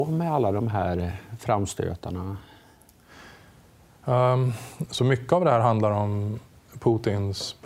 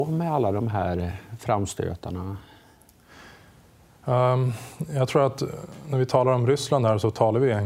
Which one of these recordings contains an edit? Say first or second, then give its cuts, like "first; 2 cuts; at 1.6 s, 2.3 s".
first; 1 cut; at 4.9 s